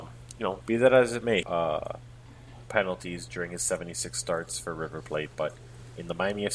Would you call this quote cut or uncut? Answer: cut